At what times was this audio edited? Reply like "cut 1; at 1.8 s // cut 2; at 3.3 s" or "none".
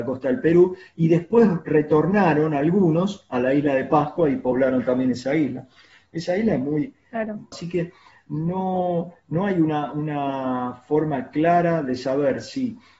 cut 1; at 7.5 s